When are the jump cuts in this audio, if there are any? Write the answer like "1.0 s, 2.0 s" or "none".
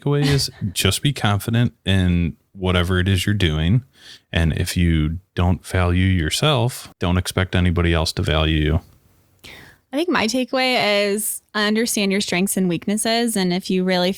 6.9 s